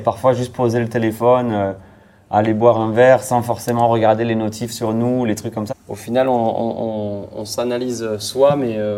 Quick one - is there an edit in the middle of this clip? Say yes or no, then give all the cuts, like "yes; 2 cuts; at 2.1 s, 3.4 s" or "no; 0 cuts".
yes; 1 cut; at 5.7 s